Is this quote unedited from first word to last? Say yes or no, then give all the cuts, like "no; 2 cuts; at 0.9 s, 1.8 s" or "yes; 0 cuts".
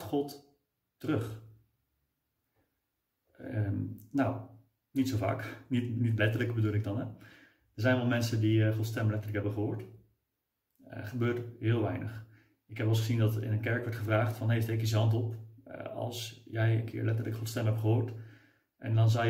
yes; 0 cuts